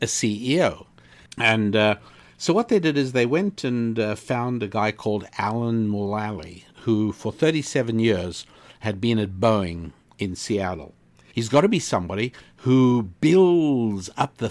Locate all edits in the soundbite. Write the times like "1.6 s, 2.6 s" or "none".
1.3 s, 11.3 s